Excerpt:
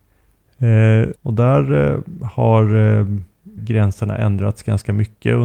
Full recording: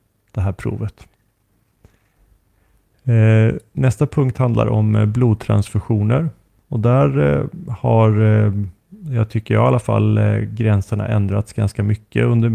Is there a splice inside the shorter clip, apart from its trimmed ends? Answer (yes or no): yes